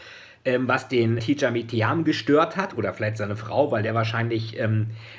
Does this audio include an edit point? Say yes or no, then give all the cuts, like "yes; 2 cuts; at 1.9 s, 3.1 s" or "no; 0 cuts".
yes; 1 cut; at 1.2 s